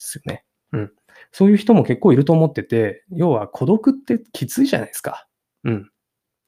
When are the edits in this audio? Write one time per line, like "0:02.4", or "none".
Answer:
none